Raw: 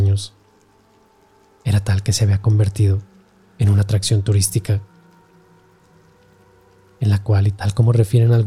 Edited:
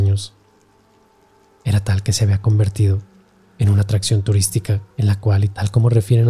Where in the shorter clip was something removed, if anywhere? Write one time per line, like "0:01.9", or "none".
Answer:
0:04.9